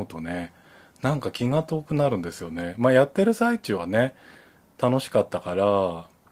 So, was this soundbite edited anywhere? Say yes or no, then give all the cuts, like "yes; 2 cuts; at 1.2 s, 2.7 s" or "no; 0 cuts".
no; 0 cuts